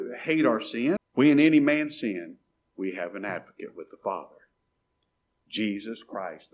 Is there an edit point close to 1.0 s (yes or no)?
yes